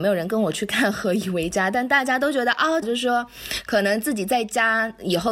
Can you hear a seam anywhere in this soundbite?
yes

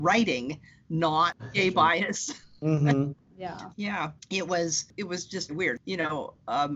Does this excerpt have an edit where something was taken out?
yes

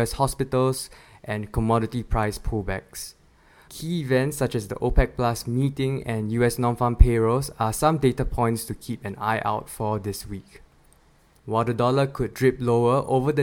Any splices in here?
yes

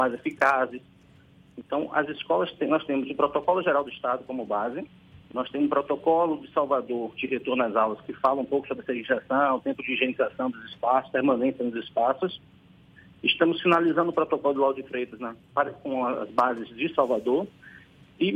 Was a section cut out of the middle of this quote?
yes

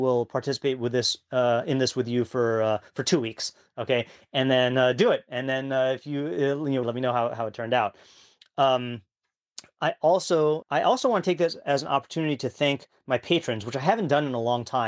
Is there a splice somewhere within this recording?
yes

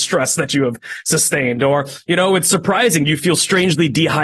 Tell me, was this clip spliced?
no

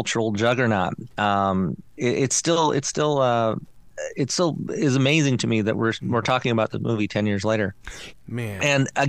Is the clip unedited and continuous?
no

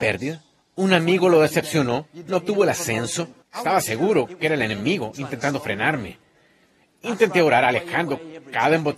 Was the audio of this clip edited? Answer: yes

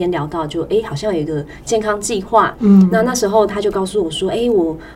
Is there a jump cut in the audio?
yes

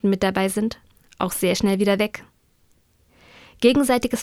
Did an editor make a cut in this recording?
no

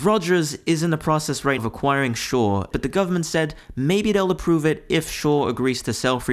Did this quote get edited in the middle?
yes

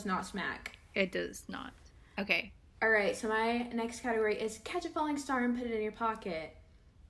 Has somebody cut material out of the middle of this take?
no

